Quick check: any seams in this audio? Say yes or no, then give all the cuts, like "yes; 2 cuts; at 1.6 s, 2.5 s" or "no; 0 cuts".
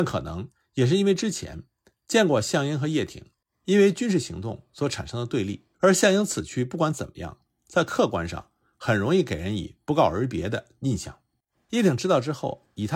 yes; 1 cut; at 5.7 s